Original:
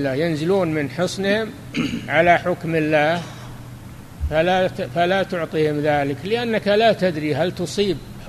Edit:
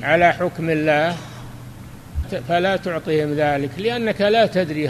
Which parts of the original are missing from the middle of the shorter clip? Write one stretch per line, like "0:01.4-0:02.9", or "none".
0:04.3-0:04.7